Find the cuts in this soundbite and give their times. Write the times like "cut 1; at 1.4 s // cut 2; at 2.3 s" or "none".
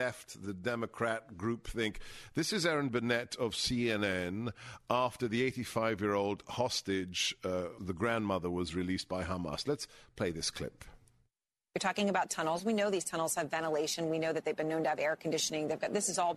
cut 1; at 7.8 s